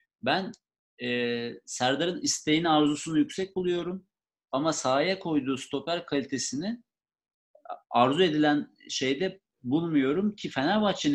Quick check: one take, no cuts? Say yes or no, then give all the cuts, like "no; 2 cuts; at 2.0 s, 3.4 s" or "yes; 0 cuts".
yes; 0 cuts